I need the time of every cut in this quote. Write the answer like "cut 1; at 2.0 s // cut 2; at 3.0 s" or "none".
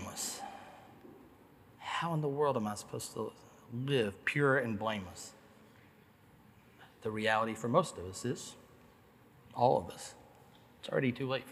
none